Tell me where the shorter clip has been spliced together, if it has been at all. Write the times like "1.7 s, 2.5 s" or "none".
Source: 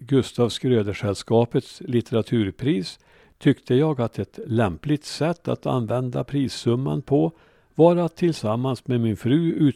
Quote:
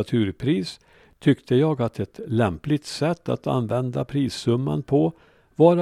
none

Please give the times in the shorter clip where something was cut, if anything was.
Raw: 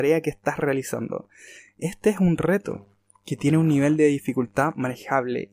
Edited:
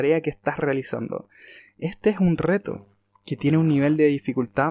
none

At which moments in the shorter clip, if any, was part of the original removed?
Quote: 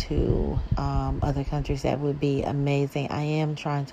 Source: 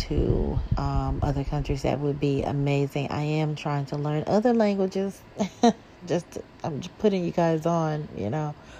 none

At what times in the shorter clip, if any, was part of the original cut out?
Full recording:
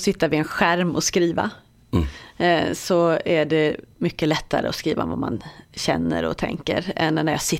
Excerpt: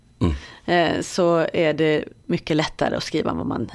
none

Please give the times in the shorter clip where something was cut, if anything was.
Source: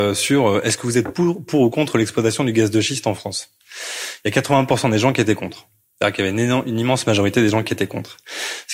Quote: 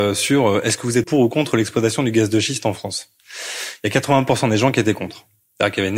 1.0 s

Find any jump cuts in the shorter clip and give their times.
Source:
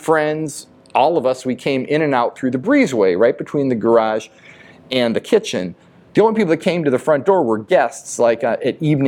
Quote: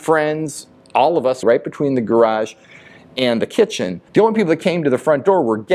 1.4 s, 4.1 s

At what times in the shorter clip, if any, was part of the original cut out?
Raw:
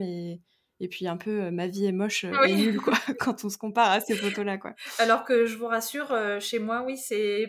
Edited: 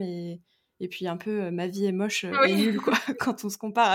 none

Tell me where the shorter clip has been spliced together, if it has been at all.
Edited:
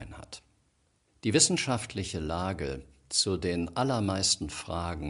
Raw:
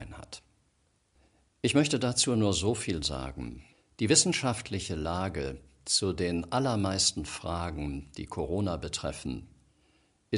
1.1 s

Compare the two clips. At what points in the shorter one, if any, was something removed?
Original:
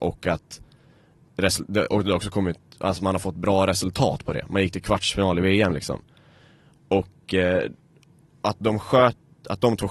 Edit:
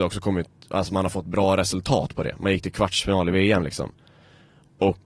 none

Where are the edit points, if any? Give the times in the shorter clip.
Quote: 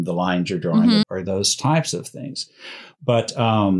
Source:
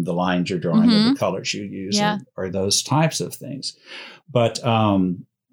1.0 s

